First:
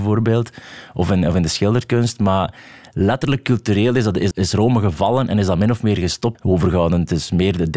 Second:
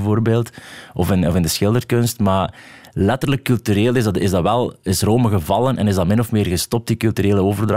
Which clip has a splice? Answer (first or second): first